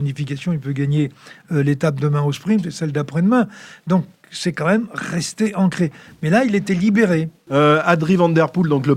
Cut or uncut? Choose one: cut